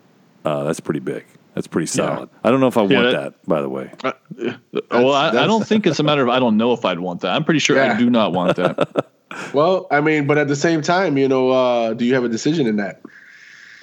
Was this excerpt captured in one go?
no; 1 cut; at 2.3 s

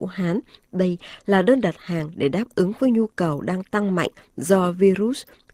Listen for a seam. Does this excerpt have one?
no; 0 cuts

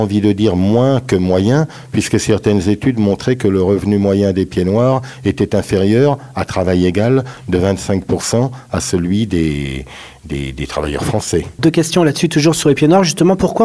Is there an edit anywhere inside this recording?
no; 0 cuts

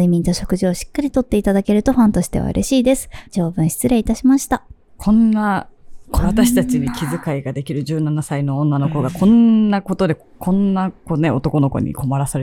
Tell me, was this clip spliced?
yes; 1 cut; at 3.2 s

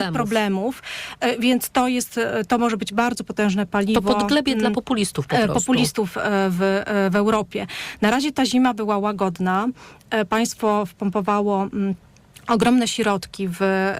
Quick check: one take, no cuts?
yes; 0 cuts

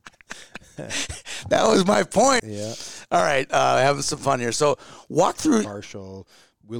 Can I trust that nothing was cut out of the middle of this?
no; 2 cuts; at 2.4 s, 5.6 s

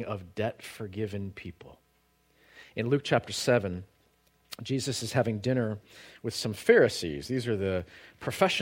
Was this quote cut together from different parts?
no; 0 cuts

